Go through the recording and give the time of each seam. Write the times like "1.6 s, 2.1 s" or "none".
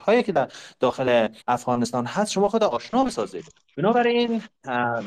1.4 s